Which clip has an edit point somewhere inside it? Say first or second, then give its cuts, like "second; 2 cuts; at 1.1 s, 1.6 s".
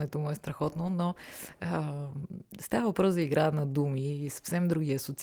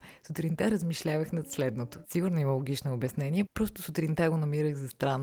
second; 1 cut; at 2.0 s